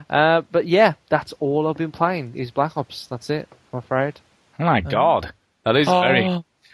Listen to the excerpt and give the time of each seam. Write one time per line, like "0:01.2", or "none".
none